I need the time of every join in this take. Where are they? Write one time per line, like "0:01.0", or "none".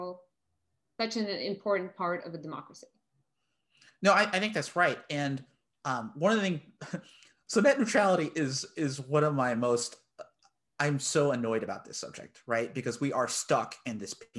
none